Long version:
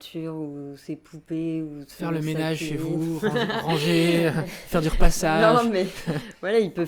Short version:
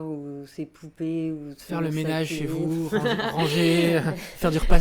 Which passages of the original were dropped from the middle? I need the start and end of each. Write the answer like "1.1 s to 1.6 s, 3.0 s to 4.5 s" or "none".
none